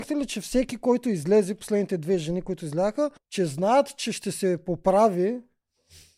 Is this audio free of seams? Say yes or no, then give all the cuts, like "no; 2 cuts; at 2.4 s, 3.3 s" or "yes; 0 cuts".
no; 1 cut; at 3.2 s